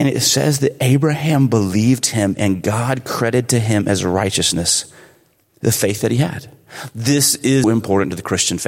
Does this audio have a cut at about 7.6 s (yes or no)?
yes